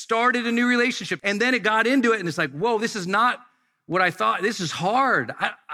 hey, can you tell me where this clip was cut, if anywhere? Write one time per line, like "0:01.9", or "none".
0:01.2